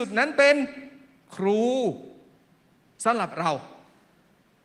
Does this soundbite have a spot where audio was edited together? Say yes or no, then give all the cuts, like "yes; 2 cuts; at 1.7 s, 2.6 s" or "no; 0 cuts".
no; 0 cuts